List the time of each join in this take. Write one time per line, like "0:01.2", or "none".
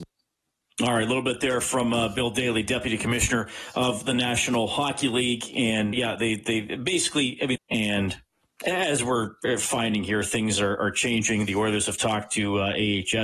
0:05.9
0:07.6